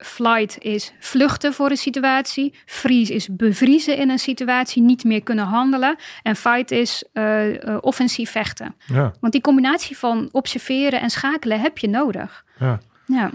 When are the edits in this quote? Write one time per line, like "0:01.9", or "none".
0:08.8